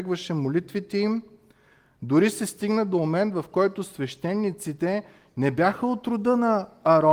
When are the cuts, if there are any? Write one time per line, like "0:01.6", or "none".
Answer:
none